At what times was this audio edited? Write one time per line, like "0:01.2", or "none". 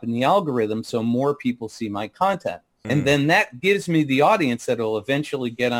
0:02.8